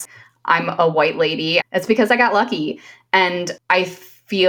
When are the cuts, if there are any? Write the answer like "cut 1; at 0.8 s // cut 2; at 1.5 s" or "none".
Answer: cut 1; at 1.6 s